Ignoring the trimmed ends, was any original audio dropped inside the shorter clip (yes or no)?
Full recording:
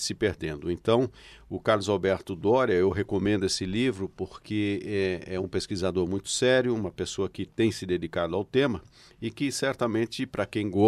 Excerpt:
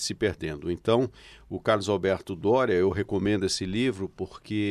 no